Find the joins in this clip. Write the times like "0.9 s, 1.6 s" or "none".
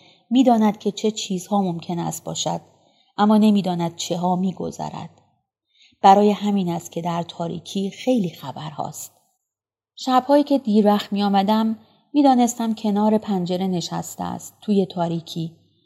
none